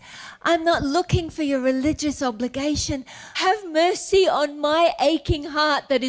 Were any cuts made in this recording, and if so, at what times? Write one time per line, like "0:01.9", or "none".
0:03.3